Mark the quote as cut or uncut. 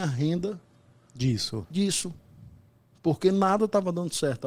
uncut